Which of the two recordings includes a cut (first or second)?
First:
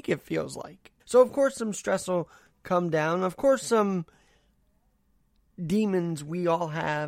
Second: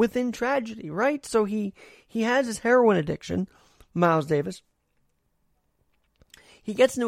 first